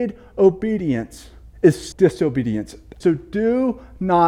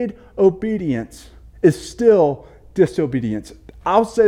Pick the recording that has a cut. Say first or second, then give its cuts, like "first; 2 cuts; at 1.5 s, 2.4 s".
first; 2 cuts; at 1.9 s, 3.0 s